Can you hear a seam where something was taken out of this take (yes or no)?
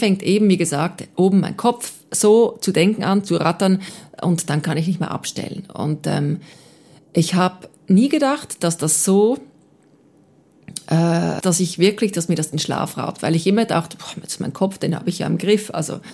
yes